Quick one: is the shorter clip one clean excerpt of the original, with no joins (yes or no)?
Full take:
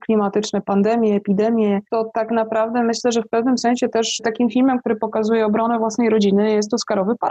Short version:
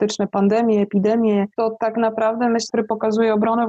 no